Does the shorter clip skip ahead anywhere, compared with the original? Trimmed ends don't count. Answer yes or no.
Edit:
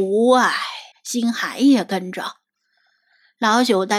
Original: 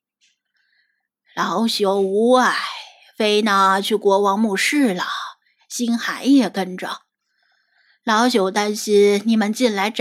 yes